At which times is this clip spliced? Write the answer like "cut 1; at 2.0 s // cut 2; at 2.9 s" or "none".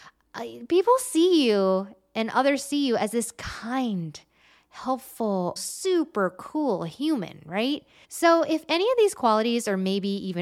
cut 1; at 5.6 s // cut 2; at 8.0 s